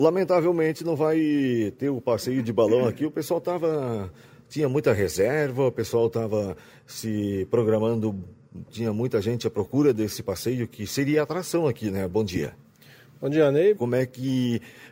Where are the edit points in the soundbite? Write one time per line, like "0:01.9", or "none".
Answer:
0:08.7
0:13.8